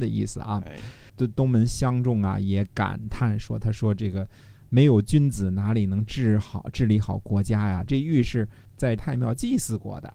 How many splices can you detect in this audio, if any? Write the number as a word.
one